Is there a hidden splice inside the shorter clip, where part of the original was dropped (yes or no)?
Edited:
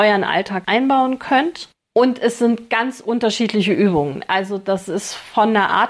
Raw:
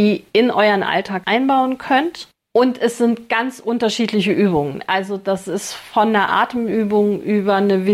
no